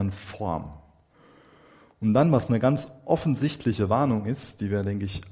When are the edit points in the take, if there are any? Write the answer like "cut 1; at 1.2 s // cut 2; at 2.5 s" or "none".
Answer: none